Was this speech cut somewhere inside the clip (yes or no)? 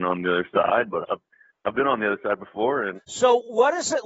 yes